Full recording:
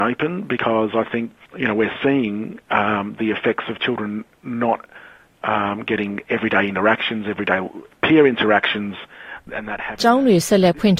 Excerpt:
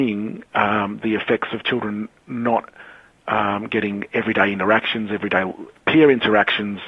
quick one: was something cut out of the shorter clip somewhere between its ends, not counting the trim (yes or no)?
no